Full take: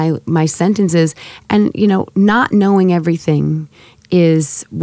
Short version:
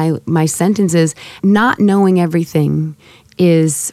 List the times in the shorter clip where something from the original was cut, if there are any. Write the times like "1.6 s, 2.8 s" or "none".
1.4 s